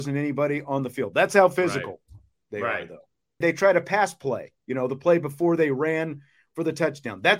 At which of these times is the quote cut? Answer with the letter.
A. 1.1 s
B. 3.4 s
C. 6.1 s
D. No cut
B